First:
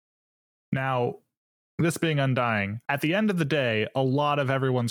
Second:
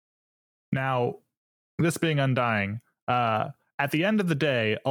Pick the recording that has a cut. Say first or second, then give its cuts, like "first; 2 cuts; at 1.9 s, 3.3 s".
first; 1 cut; at 2.9 s